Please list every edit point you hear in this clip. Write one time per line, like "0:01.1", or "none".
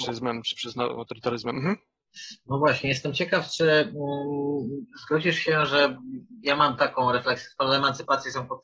none